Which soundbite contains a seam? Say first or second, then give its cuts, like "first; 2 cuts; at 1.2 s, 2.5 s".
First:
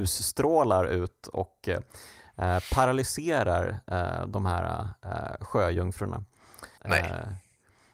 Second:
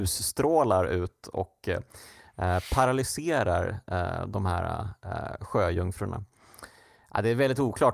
first; 1 cut; at 6.8 s